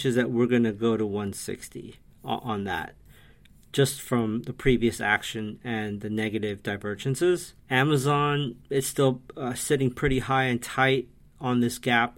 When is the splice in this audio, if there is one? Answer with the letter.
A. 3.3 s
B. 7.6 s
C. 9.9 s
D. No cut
B